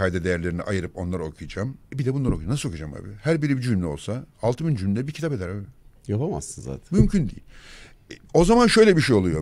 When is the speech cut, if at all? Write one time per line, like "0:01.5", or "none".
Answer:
0:01.8